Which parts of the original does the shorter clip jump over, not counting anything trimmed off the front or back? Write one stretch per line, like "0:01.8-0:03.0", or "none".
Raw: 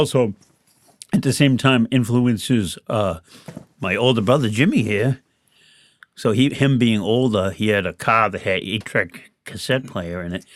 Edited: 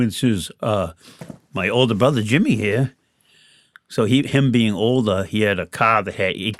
none